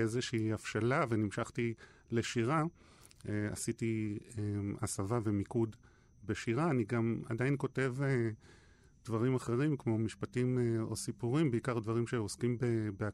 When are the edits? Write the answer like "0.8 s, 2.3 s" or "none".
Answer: none